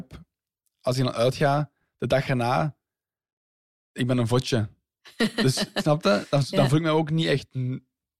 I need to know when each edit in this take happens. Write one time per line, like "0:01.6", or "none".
none